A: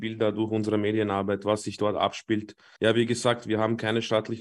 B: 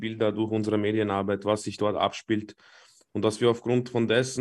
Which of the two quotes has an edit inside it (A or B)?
A